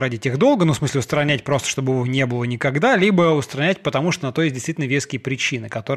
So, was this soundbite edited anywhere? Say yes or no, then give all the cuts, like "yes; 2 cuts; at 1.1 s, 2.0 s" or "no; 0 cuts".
no; 0 cuts